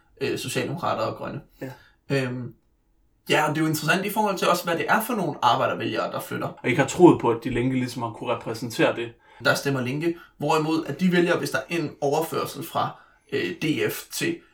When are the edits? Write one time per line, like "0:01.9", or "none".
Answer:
0:06.6
0:09.4
0:11.7